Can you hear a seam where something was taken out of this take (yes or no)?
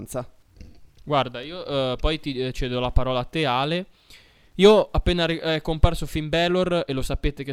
no